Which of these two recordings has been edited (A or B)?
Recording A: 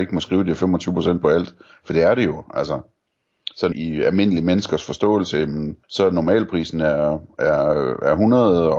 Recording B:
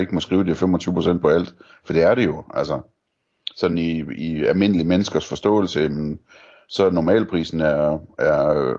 A